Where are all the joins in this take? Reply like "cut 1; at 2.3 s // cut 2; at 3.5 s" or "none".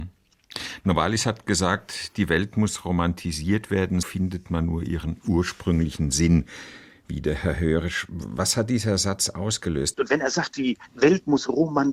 cut 1; at 4.0 s // cut 2; at 9.9 s